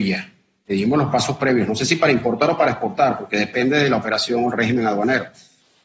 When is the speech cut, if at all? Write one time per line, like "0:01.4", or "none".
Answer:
none